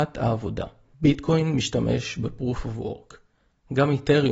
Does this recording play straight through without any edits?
no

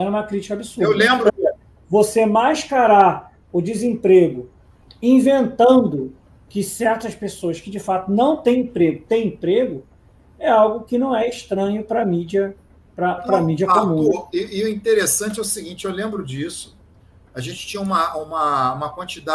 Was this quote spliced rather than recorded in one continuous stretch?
yes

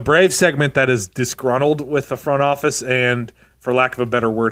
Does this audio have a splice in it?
no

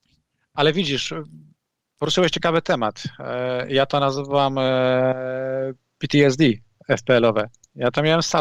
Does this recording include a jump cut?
no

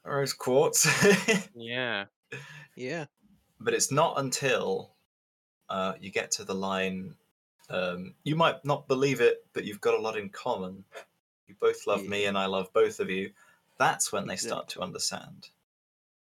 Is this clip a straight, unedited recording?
no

